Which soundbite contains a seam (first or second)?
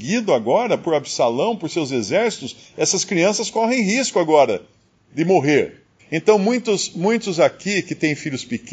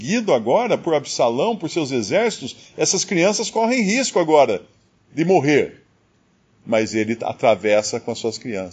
first